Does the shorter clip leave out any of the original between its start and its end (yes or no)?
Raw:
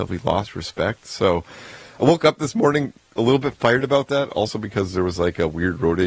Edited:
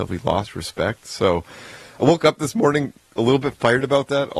no